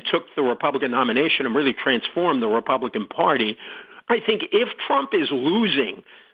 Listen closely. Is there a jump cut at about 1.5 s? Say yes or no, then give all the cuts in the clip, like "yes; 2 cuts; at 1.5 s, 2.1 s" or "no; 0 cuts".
no; 1 cut; at 4.0 s